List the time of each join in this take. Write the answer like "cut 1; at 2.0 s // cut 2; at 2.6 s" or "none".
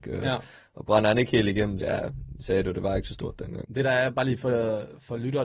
cut 1; at 1.8 s // cut 2; at 3.6 s